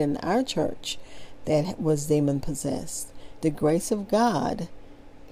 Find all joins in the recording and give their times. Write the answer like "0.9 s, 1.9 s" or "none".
3.4 s